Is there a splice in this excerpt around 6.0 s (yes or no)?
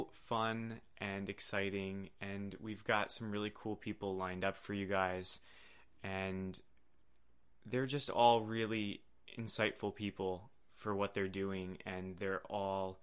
no